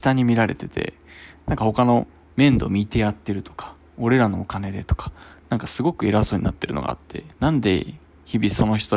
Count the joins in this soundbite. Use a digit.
2